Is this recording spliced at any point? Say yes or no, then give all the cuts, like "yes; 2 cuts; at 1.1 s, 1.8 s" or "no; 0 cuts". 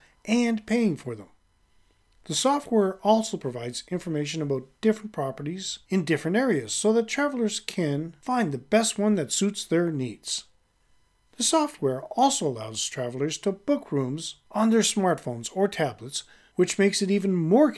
no; 0 cuts